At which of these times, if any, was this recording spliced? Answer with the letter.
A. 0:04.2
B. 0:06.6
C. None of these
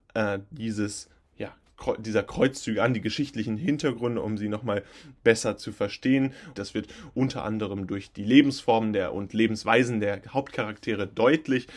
B